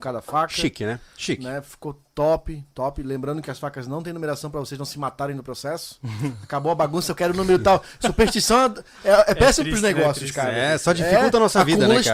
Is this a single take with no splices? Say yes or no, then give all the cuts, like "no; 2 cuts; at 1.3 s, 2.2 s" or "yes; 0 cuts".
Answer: yes; 0 cuts